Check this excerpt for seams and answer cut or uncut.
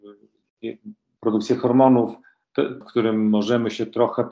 cut